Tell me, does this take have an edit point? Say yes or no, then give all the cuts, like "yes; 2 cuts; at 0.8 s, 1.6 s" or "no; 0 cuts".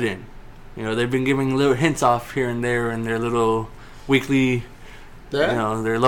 no; 0 cuts